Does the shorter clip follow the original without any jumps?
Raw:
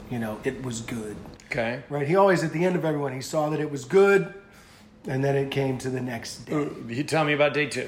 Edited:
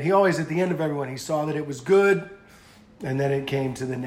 yes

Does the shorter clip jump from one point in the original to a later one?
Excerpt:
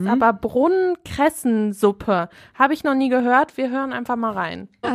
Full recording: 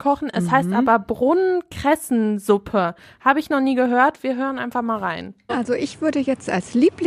no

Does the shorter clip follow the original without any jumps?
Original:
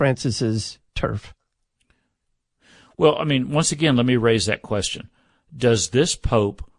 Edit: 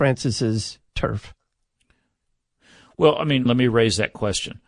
no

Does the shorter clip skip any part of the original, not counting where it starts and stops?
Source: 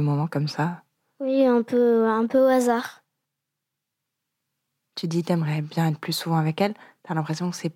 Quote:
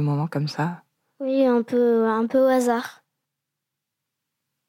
no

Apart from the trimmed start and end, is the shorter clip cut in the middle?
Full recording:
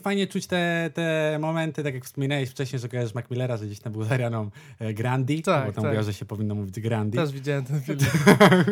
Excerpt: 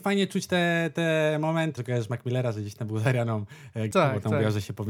yes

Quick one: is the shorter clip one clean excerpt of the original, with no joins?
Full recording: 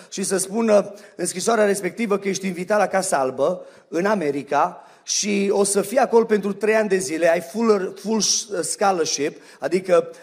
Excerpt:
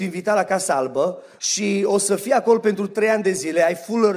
no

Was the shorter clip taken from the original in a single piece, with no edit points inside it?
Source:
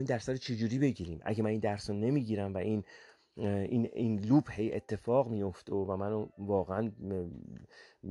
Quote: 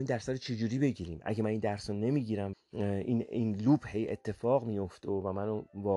no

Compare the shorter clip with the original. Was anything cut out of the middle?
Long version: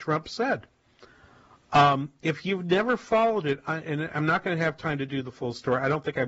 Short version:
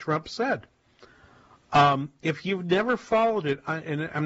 no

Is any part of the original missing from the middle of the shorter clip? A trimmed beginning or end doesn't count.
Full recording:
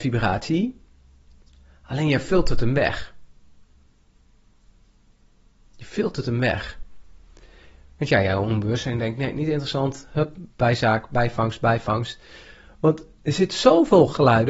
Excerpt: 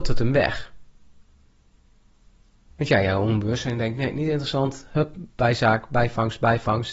yes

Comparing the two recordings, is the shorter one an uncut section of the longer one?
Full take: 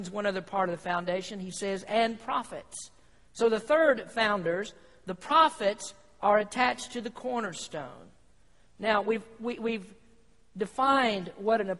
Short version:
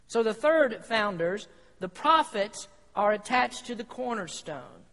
yes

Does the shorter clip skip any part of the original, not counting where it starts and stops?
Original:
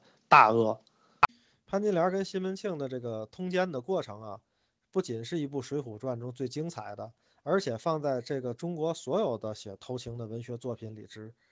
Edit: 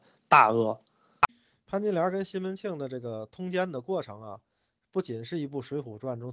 no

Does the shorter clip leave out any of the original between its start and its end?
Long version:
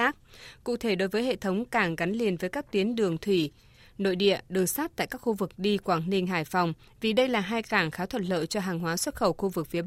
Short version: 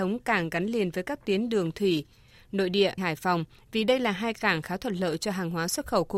yes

